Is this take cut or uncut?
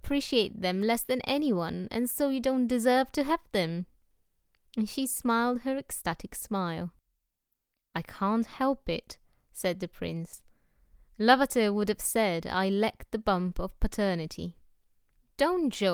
uncut